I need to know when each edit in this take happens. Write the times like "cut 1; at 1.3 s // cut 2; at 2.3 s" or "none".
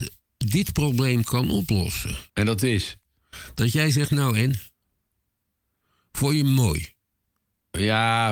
cut 1; at 2.3 s